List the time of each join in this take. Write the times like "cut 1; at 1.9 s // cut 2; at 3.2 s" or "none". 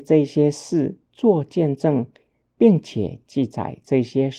none